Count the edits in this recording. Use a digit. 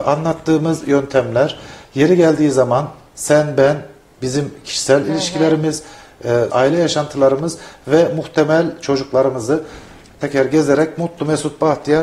2